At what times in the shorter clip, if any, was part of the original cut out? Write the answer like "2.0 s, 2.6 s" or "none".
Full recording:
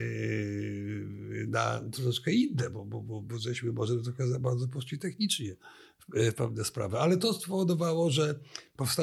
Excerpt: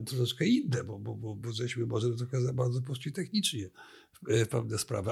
none